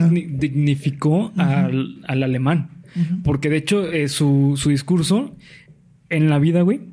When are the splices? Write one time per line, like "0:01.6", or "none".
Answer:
none